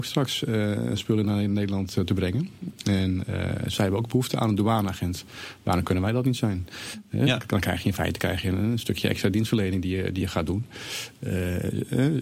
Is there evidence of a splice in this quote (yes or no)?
no